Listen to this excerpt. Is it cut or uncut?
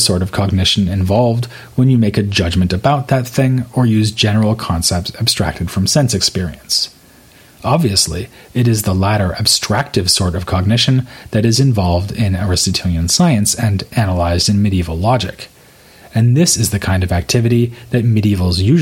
uncut